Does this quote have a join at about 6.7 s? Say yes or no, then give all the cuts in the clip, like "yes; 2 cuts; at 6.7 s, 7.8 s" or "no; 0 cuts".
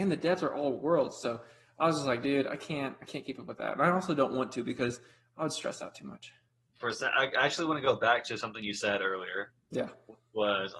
yes; 1 cut; at 6.7 s